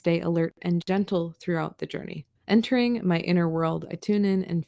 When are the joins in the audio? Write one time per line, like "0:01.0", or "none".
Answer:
0:02.4